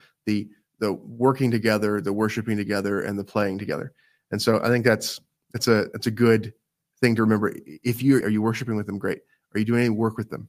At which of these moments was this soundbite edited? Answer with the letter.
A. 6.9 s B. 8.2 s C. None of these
B